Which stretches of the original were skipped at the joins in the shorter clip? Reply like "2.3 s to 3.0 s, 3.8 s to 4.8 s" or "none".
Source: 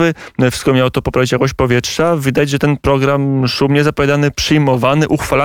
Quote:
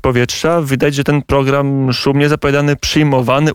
none